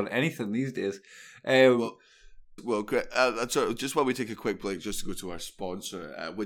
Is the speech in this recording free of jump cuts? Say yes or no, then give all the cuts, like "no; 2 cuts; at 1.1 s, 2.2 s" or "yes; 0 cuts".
no; 1 cut; at 2.6 s